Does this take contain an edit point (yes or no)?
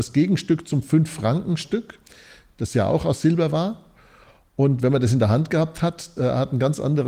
yes